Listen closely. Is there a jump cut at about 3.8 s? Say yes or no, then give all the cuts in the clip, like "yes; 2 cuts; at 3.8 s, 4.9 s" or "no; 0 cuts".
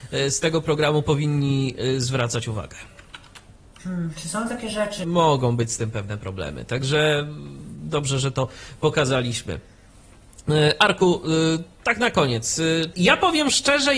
yes; 3 cuts; at 3.8 s, 5.0 s, 12.9 s